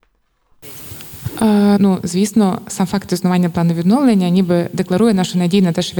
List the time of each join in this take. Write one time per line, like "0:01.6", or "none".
0:01.8